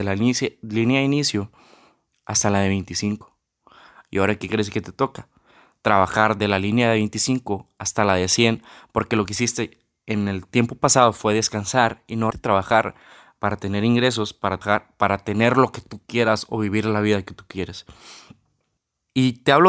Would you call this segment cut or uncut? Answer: cut